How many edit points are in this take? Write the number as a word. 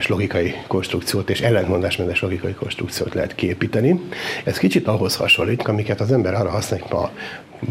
three